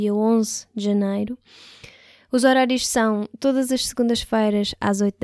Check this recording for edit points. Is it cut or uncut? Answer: uncut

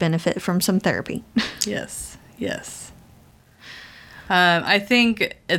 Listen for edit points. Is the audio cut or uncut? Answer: uncut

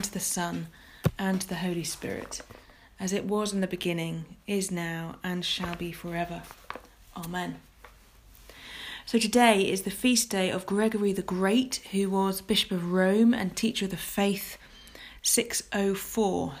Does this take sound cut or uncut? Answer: uncut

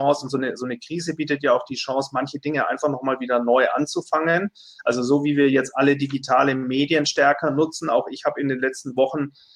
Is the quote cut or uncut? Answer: uncut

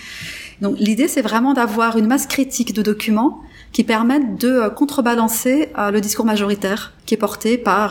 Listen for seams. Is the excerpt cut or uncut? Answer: cut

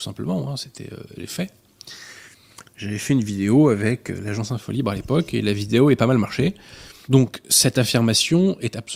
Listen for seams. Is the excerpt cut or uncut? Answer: cut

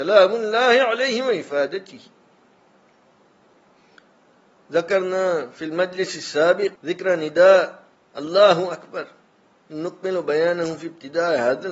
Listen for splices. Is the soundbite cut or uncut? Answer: cut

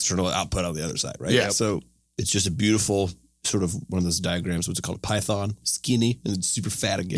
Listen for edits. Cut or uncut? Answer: cut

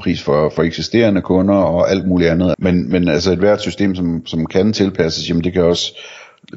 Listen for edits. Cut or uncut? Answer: cut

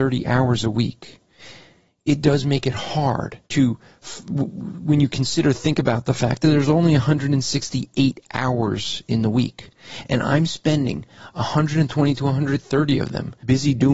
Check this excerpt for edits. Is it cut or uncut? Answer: cut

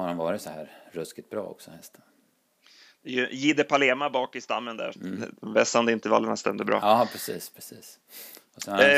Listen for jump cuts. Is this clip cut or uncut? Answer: cut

